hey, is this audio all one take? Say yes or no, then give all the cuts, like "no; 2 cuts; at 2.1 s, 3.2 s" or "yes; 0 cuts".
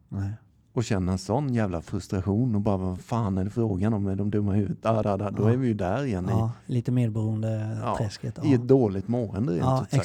no; 1 cut; at 5.0 s